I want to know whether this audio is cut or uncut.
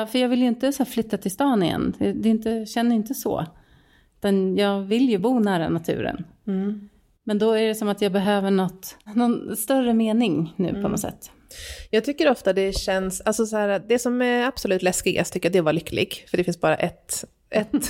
uncut